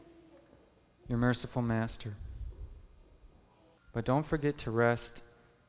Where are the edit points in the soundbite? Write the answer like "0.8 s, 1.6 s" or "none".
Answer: 3.8 s